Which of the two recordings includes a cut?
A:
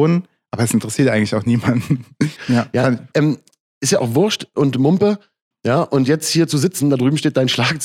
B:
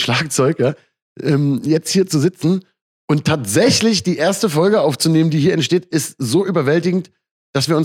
A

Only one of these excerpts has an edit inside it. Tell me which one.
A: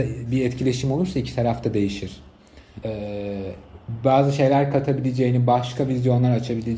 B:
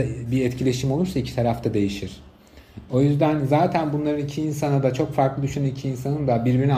A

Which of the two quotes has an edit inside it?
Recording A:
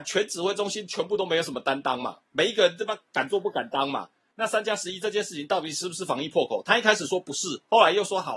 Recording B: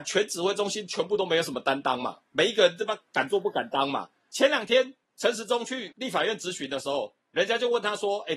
A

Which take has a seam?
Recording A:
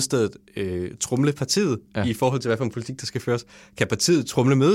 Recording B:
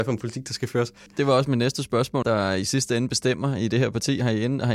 B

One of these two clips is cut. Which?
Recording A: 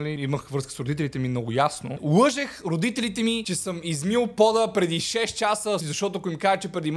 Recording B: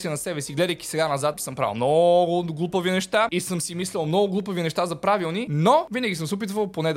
A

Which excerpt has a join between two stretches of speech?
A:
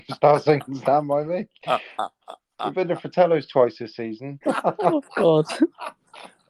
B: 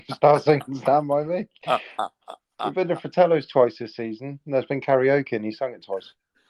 A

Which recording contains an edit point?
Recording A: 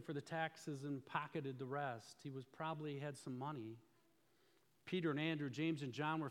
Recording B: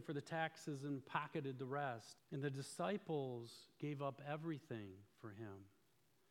B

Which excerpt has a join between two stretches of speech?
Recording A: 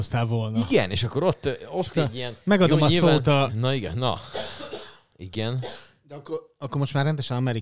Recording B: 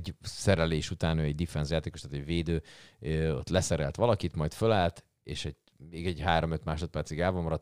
A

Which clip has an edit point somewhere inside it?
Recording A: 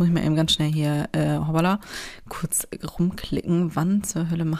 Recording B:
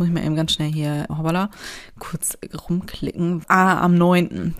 B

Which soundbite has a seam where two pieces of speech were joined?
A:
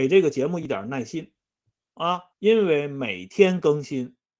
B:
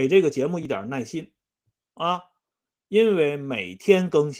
A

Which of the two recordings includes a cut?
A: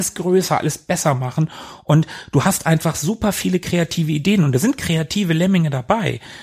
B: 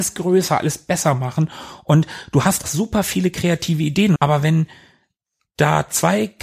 B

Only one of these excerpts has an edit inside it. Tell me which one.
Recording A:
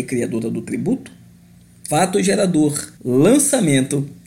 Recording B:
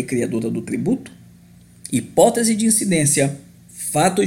A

